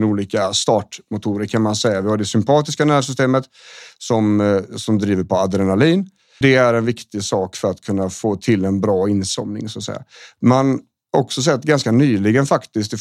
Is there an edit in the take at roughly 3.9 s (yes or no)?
no